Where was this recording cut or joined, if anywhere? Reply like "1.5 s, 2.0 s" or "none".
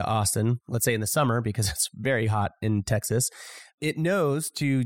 none